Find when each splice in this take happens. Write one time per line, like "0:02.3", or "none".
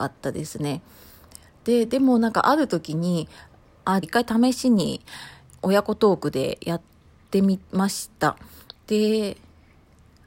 0:04.0
0:05.5